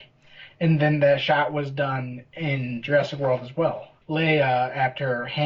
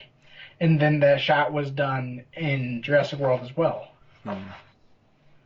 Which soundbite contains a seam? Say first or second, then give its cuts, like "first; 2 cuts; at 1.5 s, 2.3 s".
first; 1 cut; at 4.0 s